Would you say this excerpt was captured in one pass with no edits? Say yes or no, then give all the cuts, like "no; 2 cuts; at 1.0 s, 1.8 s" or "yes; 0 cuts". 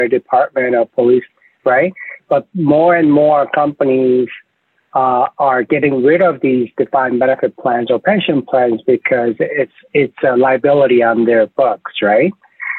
yes; 0 cuts